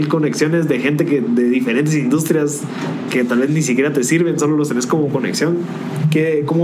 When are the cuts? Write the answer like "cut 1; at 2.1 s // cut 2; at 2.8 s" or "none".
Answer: cut 1; at 3.1 s